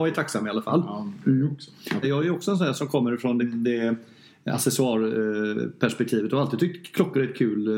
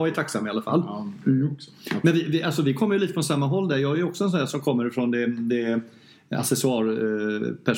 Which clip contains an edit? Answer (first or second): first